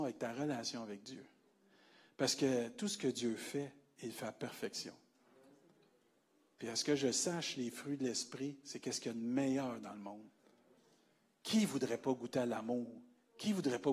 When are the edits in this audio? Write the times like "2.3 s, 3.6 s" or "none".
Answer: none